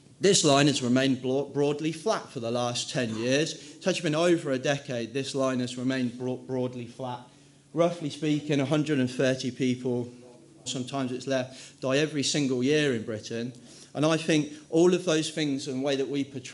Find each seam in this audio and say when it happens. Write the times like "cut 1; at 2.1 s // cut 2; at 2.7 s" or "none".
cut 1; at 10.7 s